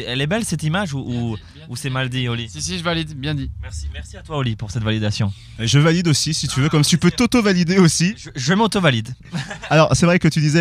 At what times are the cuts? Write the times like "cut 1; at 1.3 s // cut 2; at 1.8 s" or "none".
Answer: cut 1; at 6.8 s